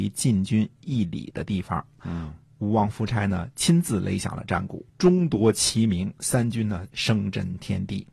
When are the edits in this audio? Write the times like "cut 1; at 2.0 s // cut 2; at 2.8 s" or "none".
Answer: cut 1; at 2.0 s // cut 2; at 4.9 s // cut 3; at 6.9 s